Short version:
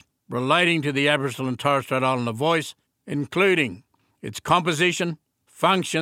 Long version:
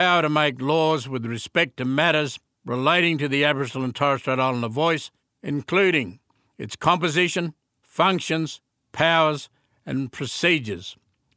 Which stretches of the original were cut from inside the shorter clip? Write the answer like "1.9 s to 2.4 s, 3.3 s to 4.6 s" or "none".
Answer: none